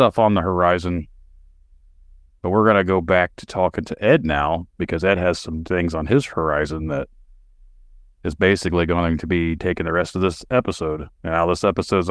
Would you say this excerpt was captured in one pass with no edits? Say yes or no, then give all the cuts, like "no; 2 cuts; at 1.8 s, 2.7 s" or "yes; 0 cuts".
yes; 0 cuts